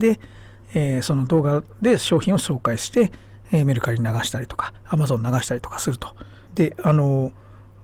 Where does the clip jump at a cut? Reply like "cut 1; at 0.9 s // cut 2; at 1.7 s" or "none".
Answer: cut 1; at 6.5 s